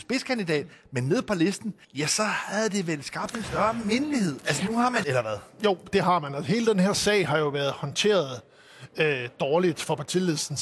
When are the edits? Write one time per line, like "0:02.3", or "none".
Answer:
0:01.8
0:05.0